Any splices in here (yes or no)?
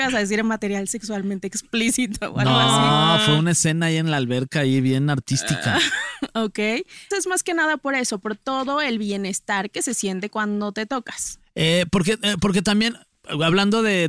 yes